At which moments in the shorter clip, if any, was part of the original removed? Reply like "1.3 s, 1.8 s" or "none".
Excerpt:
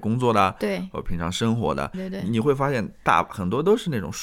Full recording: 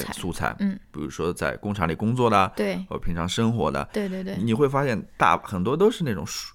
1.9 s